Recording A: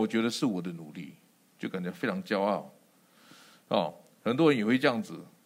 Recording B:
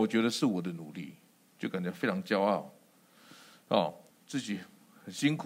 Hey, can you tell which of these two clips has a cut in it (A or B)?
B